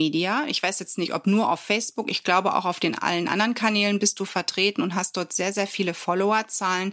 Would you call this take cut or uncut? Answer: uncut